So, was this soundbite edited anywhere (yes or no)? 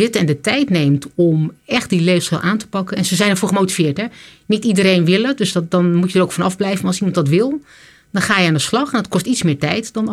no